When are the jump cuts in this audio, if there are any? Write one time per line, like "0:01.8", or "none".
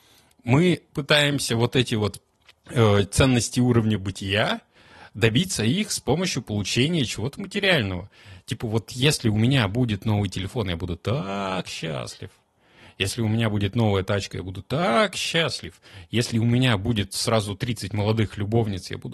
none